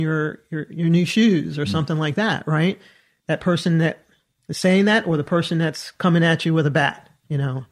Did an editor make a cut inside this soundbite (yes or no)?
no